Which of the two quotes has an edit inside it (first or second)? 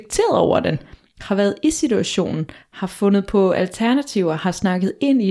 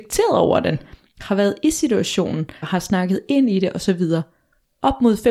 second